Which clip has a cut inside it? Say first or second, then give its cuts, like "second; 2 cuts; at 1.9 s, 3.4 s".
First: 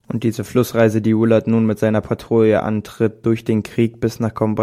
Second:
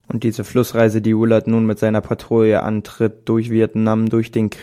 first; 1 cut; at 3.2 s